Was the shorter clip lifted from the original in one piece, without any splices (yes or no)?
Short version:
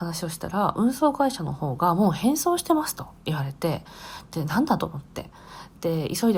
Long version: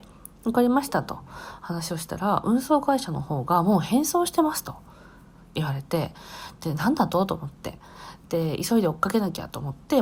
no